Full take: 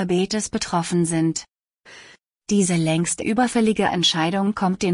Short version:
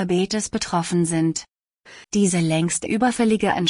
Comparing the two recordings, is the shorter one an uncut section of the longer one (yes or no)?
no